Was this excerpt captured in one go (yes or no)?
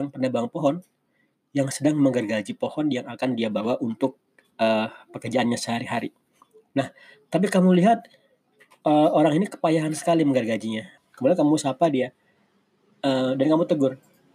no